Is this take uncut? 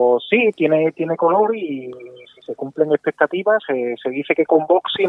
yes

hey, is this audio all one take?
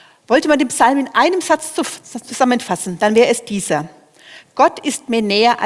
yes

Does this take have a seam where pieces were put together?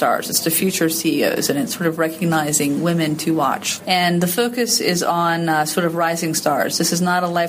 yes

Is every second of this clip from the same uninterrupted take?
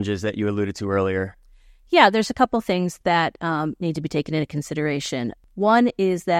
yes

